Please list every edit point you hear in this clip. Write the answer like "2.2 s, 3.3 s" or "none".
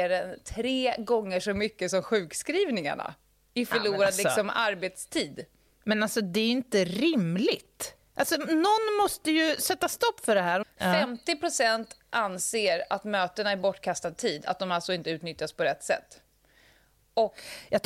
8.0 s, 10.6 s